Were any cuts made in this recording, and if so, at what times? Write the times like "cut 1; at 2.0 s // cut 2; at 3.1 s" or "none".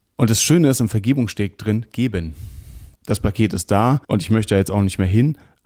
cut 1; at 3.0 s // cut 2; at 4.0 s